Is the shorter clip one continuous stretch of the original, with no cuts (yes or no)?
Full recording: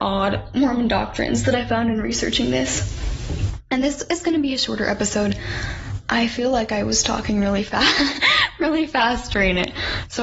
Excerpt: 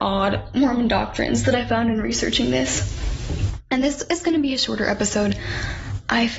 yes